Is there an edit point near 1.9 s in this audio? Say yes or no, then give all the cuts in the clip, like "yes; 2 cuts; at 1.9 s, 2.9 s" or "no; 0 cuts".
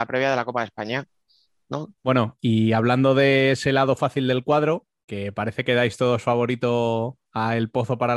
yes; 1 cut; at 1.9 s